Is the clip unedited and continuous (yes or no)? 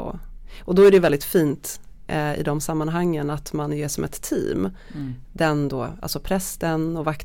yes